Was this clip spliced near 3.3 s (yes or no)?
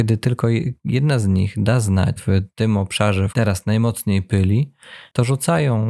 yes